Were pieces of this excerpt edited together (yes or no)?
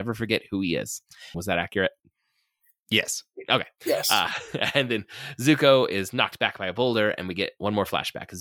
yes